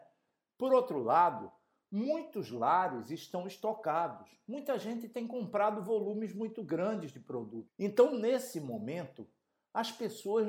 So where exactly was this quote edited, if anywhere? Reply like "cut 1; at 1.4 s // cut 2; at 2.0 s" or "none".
cut 1; at 7.7 s